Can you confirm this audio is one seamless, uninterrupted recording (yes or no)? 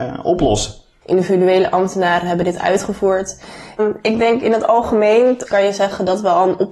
no